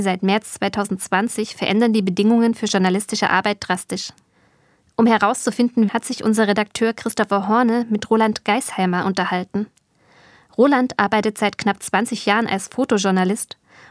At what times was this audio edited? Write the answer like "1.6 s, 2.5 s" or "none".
5.9 s